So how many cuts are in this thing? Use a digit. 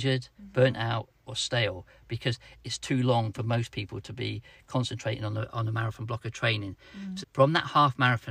1